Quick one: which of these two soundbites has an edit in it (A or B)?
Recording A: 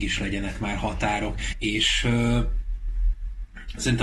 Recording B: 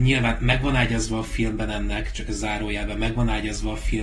A